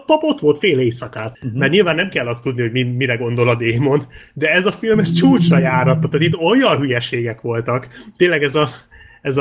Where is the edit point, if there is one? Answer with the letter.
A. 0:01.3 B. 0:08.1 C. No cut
A